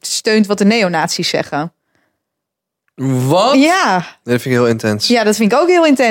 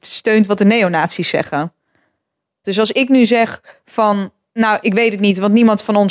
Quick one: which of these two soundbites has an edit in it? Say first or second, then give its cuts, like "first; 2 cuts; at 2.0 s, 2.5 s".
second; 2 cuts; at 2.6 s, 4.8 s